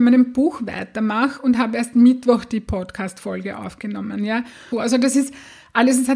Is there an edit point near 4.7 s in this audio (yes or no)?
yes